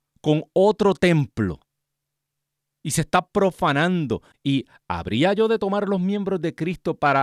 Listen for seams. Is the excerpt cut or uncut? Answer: cut